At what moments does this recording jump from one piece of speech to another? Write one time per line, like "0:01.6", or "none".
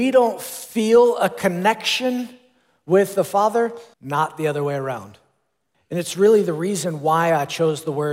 0:03.9
0:05.7

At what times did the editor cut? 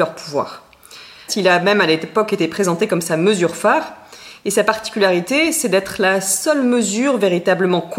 0:01.3

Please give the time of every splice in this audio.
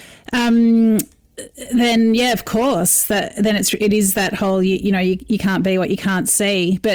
none

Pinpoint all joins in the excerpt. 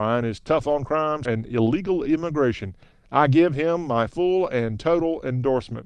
0:01.2
0:02.9

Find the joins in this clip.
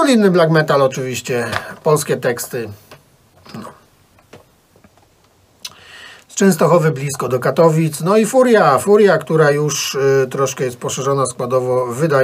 none

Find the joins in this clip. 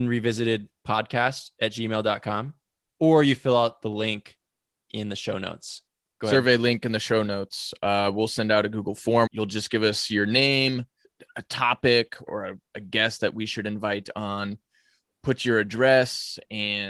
0:02.9
0:09.3
0:12.3

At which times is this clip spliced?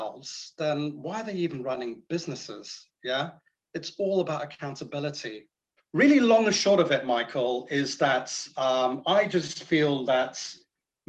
0:05.8

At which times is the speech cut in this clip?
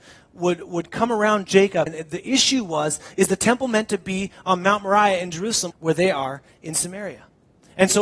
0:01.9
0:05.7

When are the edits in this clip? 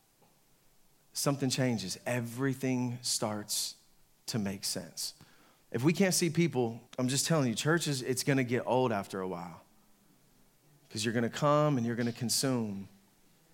0:06.9

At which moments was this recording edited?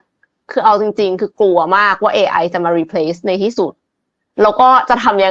none

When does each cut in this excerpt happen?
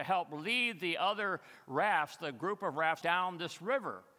0:03.0

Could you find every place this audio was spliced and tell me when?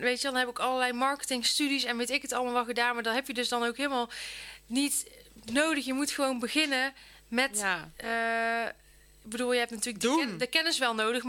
none

